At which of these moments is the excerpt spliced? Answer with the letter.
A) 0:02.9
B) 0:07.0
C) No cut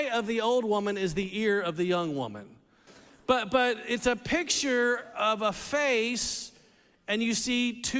A